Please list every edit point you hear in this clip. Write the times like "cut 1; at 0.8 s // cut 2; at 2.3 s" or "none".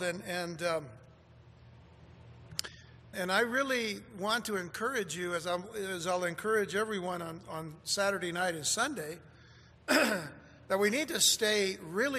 cut 1; at 3.1 s